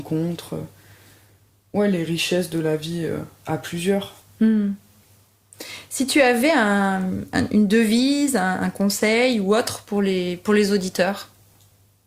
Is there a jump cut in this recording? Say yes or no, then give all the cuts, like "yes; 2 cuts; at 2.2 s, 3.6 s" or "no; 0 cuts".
no; 0 cuts